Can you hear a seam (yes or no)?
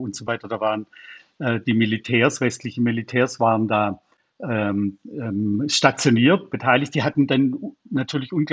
no